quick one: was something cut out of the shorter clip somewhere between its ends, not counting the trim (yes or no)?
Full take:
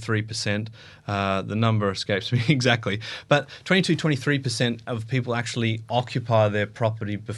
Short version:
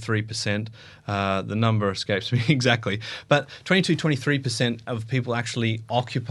no